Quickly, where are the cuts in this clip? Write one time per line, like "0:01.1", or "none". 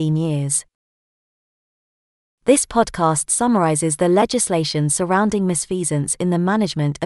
none